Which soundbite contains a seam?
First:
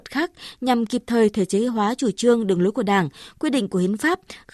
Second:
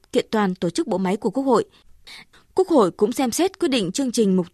second; 1 cut; at 2.3 s

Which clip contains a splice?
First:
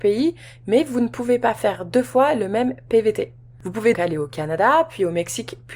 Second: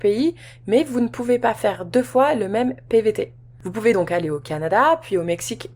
first; 1 cut; at 3.9 s

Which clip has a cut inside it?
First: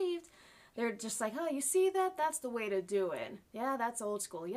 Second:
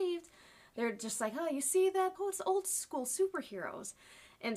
second; 1 cut; at 2.1 s

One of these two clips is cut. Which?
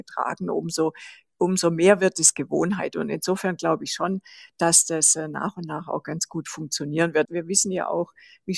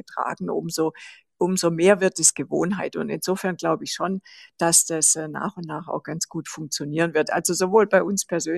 first; 1 cut; at 7.3 s

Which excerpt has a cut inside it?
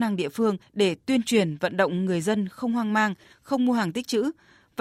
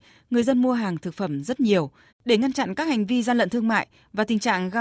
second; 1 cut; at 2.1 s

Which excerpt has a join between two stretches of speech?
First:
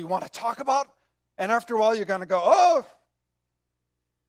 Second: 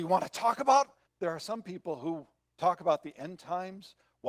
second; 1 cut; at 1.1 s

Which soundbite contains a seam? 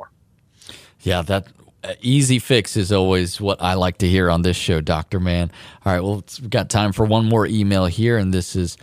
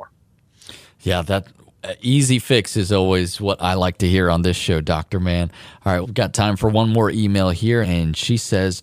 second; 2 cuts; at 6.0 s, 7.8 s

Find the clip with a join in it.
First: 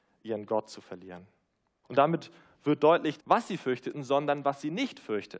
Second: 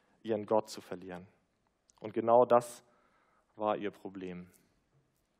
first; 2 cuts; at 1.8 s, 3.2 s

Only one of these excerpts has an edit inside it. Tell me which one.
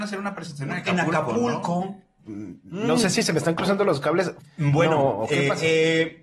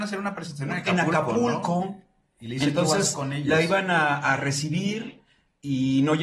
first; 2 cuts; at 2.2 s, 4.4 s

